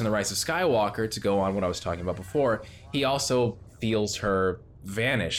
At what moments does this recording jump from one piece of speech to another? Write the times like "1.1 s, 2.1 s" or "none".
none